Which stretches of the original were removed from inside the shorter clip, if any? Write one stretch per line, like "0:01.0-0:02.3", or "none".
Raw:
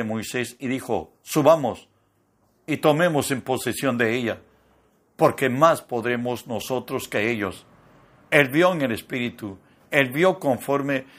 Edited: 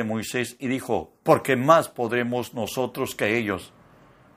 0:01.2-0:05.1